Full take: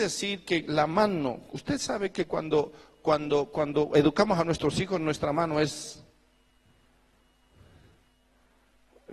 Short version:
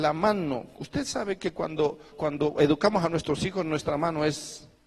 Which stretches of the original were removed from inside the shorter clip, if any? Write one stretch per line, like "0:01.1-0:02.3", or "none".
0:02.9-0:03.5

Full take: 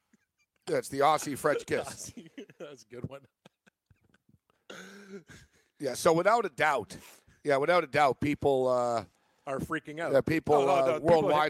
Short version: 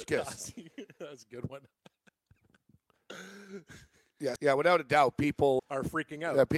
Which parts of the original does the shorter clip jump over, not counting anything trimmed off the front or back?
0:06.0-0:07.4
0:08.6-0:09.4

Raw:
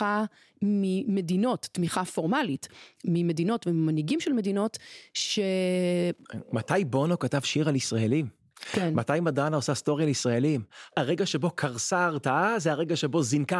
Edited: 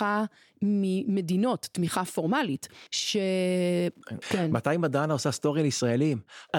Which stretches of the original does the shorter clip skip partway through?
0:02.9-0:05.1
0:06.4-0:08.6

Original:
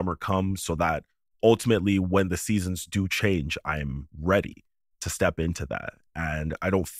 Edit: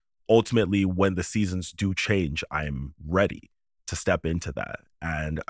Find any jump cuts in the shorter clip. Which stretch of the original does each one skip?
none

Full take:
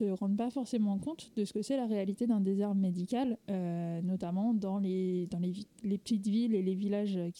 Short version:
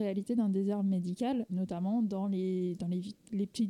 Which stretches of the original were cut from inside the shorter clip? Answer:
0:03.4-0:04.0

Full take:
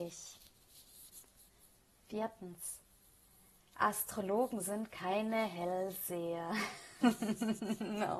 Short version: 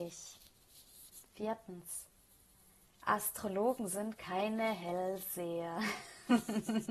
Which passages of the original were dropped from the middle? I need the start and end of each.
0:01.3-0:02.0

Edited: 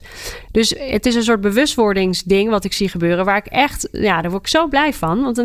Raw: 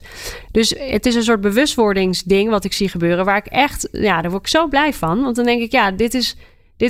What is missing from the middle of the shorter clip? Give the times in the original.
none

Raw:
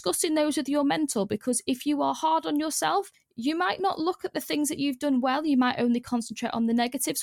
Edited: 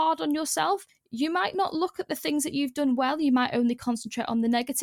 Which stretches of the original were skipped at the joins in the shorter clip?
none

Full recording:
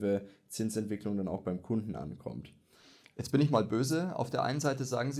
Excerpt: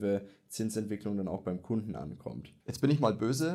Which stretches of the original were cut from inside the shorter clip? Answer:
0:02.6-0:03.1

